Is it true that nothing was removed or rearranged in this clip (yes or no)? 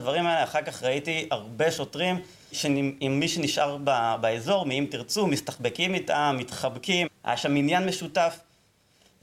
no